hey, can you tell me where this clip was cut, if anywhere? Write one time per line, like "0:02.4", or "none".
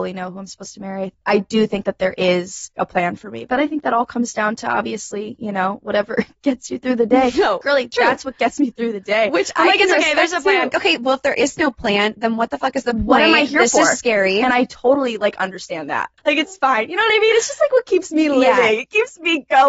0:10.7
0:16.2